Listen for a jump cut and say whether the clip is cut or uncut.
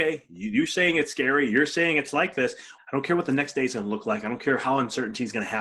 cut